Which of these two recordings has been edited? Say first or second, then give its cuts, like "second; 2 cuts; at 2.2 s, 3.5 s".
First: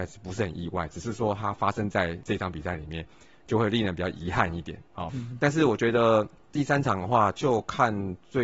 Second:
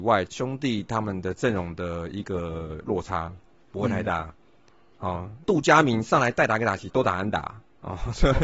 first; 1 cut; at 5.1 s